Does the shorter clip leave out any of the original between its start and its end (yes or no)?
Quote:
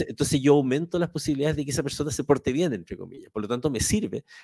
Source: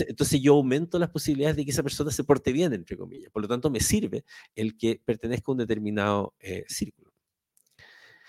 no